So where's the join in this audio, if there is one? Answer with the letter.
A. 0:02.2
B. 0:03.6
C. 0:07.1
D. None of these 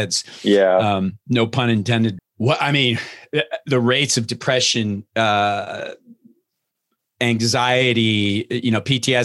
A